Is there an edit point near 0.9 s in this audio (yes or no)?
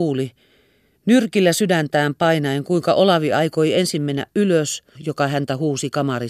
no